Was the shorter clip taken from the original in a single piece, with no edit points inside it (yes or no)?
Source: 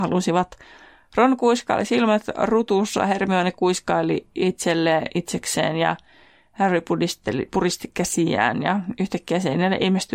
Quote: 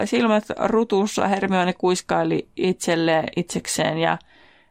yes